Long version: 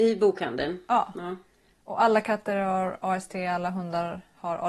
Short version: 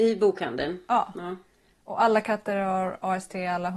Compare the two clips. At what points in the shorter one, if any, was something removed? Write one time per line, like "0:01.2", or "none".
none

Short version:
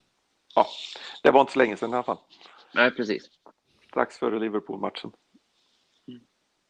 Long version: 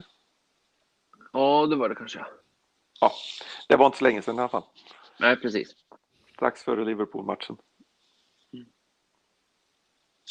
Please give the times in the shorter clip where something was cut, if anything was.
none

